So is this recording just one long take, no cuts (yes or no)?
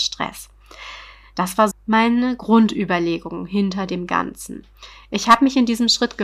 no